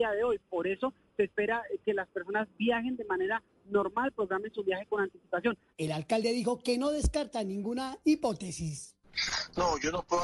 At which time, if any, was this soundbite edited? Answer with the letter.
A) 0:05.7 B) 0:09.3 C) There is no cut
A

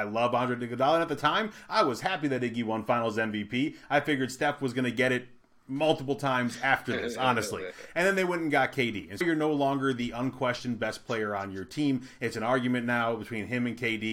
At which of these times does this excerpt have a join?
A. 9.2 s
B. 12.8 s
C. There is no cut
A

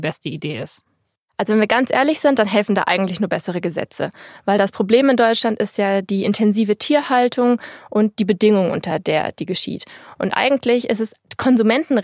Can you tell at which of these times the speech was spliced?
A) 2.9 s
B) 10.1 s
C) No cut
C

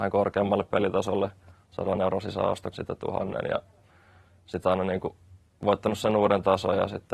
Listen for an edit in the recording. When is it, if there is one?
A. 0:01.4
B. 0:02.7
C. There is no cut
B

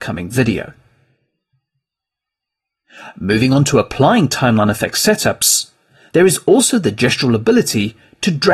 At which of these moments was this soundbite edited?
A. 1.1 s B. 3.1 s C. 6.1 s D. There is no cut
C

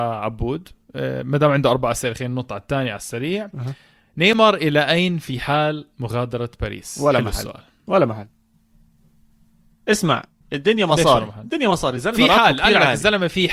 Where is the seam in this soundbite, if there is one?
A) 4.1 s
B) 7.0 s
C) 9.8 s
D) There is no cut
D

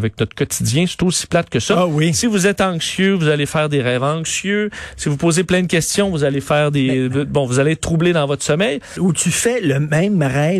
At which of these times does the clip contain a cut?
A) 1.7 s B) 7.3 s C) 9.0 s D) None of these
C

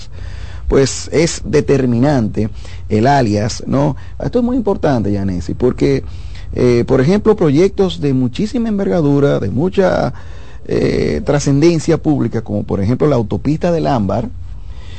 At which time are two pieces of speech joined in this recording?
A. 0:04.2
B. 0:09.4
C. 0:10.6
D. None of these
A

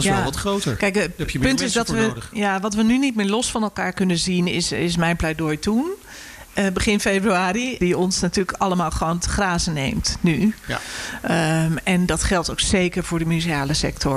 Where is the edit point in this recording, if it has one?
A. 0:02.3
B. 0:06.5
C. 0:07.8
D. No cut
C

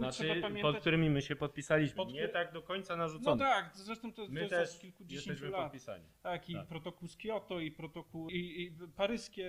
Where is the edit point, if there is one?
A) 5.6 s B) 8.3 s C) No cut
B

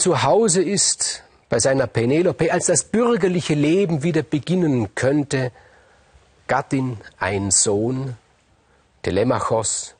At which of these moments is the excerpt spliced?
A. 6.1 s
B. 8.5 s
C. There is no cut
C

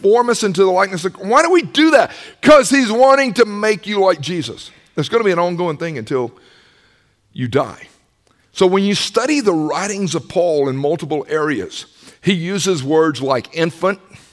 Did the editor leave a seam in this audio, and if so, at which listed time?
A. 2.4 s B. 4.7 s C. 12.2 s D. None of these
D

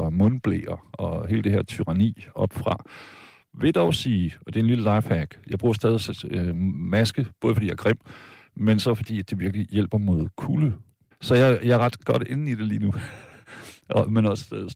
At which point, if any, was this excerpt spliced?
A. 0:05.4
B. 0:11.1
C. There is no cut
B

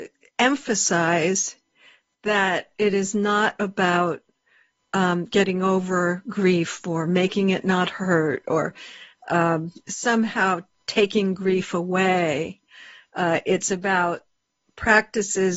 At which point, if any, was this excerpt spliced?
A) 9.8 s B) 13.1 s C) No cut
A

